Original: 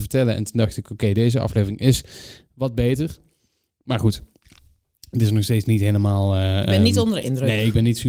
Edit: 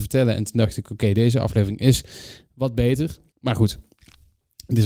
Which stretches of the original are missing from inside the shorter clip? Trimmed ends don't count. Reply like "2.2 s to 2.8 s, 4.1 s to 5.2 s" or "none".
3.3 s to 3.7 s